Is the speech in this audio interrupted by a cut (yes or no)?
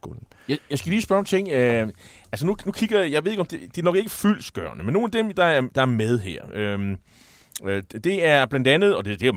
no